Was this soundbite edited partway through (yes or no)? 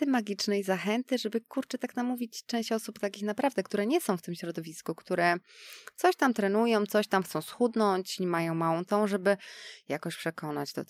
no